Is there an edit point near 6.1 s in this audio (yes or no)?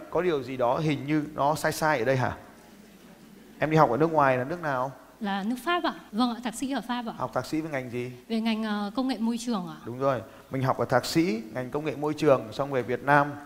yes